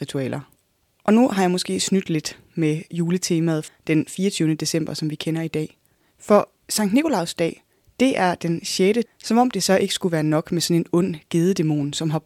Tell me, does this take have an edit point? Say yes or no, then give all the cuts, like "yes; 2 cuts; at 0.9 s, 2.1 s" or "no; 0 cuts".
yes; 2 cuts; at 3.7 s, 9.0 s